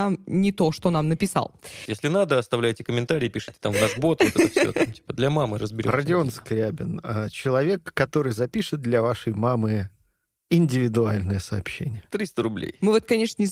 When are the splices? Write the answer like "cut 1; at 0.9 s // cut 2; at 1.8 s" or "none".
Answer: cut 1; at 1.9 s